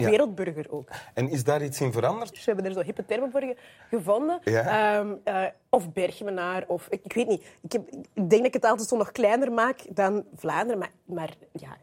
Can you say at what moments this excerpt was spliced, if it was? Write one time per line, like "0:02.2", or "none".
0:02.3